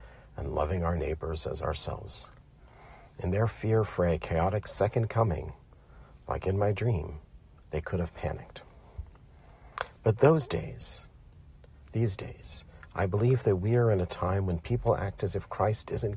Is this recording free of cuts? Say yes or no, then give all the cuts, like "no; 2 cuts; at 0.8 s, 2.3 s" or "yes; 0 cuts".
yes; 0 cuts